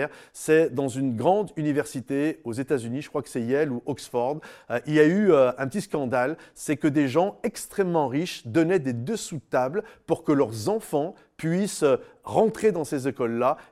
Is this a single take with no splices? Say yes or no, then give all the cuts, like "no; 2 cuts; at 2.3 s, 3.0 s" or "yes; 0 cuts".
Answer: yes; 0 cuts